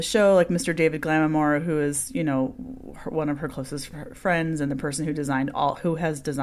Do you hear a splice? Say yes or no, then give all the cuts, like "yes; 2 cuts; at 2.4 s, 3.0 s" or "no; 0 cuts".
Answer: no; 0 cuts